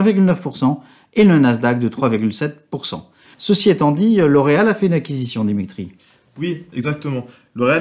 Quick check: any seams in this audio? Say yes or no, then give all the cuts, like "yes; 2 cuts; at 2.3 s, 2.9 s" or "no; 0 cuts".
yes; 1 cut; at 3.3 s